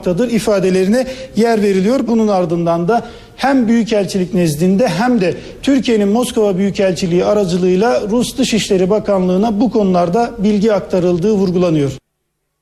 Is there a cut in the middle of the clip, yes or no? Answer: yes